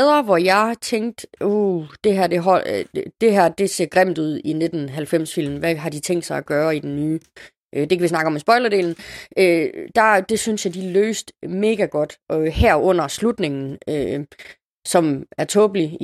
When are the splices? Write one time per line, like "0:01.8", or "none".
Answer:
none